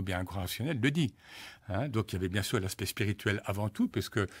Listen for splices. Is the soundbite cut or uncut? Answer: cut